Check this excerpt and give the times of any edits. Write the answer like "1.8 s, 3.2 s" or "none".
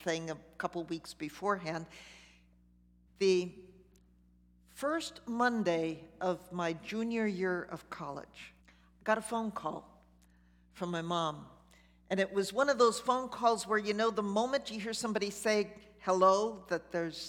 3.1 s, 8.6 s